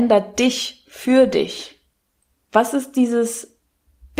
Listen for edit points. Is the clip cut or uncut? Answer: cut